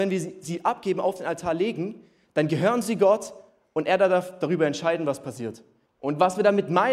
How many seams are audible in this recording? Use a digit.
1